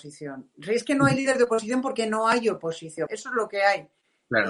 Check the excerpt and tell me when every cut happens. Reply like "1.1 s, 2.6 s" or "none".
3.1 s